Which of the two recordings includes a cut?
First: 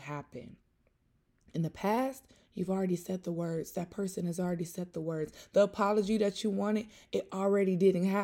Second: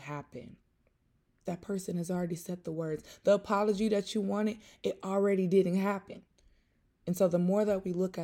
second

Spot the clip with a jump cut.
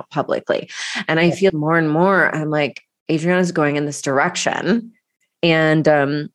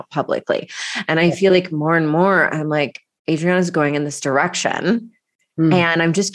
first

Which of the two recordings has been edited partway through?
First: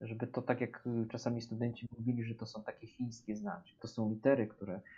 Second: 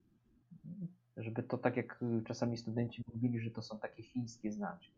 first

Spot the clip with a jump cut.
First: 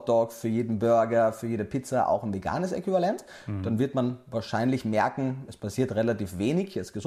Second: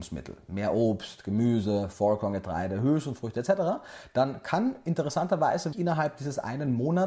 second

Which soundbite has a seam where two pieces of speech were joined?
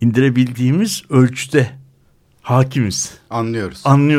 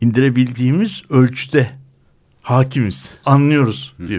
second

